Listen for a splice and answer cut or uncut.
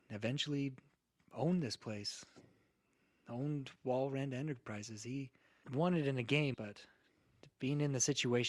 cut